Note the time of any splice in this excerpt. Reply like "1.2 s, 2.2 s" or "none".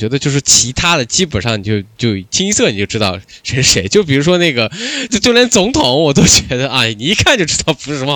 5.1 s